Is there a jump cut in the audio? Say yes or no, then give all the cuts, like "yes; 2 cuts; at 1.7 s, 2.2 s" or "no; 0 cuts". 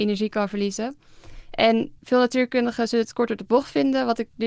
yes; 1 cut; at 2.0 s